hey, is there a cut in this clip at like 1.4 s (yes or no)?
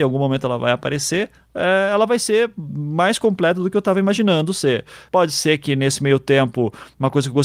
no